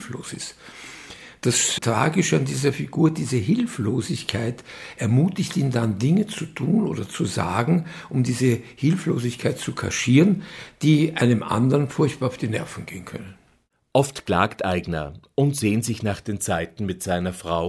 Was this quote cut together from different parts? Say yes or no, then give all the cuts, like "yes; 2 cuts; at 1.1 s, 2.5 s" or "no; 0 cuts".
yes; 1 cut; at 1.8 s